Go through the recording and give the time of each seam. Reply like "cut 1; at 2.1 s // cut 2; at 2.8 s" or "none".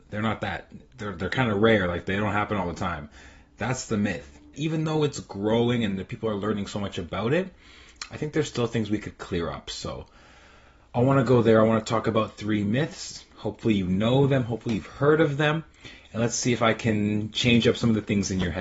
cut 1; at 4.5 s